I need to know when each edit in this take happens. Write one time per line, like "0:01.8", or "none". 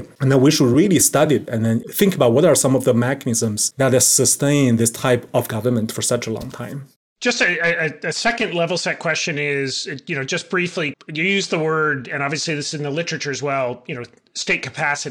0:10.9